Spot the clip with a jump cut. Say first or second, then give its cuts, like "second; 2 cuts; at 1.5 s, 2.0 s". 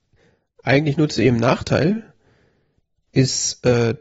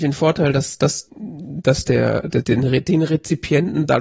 second; 2 cuts; at 1.1 s, 2.4 s